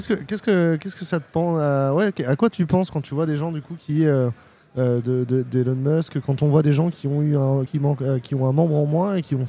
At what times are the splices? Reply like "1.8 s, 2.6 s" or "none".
5.0 s, 6.2 s, 7.7 s